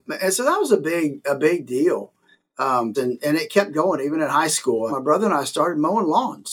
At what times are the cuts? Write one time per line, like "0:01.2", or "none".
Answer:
0:02.9
0:04.9